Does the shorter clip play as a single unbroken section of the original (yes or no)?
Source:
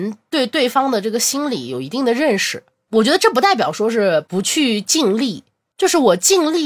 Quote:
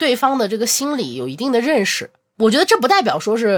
yes